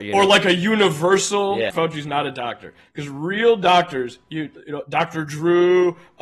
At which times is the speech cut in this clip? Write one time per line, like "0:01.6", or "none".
0:01.7

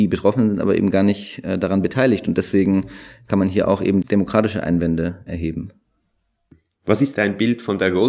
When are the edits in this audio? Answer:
0:05.3
0:07.1

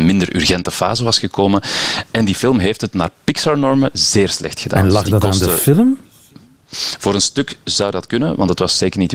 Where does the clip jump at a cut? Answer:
none

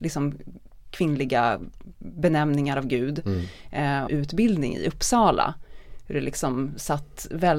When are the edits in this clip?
0:04.1

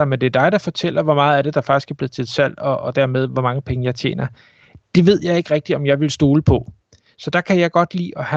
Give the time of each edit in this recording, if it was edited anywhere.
none

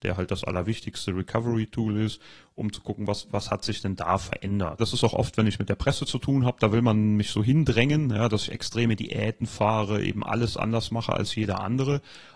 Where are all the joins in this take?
0:04.8

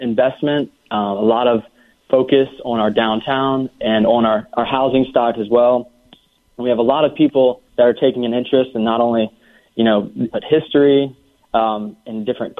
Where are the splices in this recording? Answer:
0:07.7
0:10.3

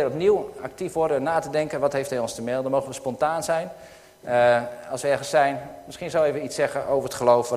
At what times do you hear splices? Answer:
none

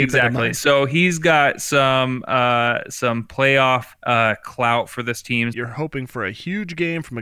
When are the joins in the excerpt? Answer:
0:04.0
0:05.5

